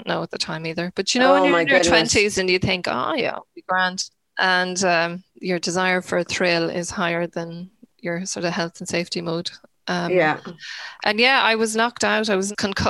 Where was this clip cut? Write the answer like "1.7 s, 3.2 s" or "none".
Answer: none